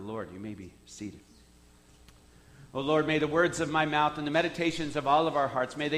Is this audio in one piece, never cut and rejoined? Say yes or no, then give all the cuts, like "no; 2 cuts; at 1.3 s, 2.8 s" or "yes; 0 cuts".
yes; 0 cuts